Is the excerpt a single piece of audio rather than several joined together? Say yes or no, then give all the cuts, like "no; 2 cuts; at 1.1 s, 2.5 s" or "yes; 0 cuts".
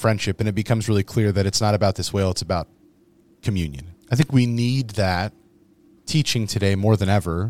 no; 1 cut; at 4.0 s